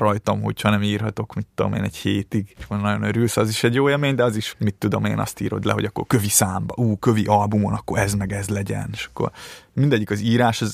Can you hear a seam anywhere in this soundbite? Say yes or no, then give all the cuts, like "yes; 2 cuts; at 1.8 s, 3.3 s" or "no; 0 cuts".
yes; 2 cuts; at 2.6 s, 4.5 s